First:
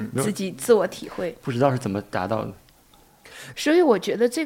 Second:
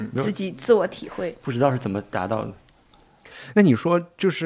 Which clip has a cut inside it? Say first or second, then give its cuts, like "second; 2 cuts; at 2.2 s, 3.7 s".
first; 1 cut; at 3.5 s